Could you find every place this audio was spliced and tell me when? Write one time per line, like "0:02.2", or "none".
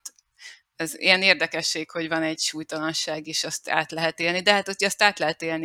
none